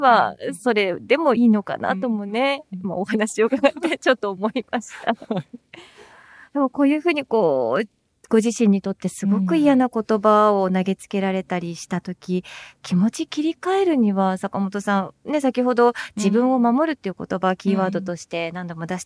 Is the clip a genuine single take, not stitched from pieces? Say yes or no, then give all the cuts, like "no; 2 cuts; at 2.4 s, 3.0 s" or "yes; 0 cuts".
no; 1 cut; at 1.4 s